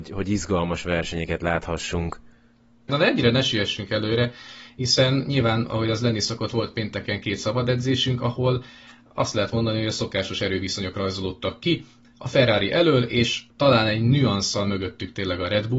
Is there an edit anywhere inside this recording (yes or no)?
yes